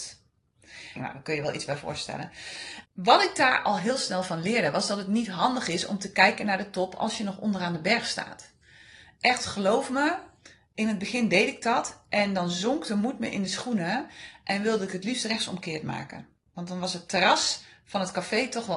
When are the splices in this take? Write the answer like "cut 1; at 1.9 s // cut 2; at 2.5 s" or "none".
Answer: cut 1; at 1.0 s // cut 2; at 2.8 s

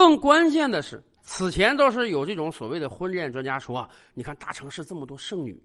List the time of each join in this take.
cut 1; at 1.2 s

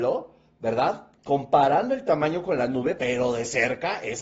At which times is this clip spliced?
cut 1; at 1.2 s // cut 2; at 3.0 s

